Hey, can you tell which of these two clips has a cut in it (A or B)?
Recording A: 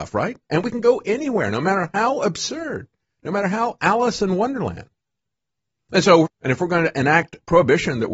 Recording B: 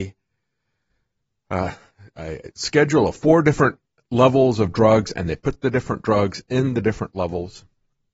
A